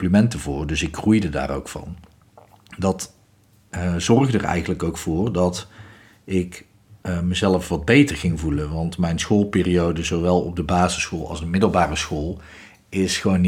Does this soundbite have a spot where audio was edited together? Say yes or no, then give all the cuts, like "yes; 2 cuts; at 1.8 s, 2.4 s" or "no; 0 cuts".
no; 0 cuts